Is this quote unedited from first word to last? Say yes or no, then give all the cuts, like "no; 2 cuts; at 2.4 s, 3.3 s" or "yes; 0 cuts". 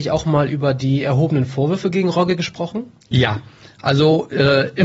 yes; 0 cuts